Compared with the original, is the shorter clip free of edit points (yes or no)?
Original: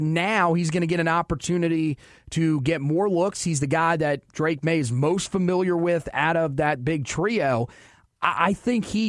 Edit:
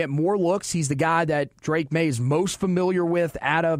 yes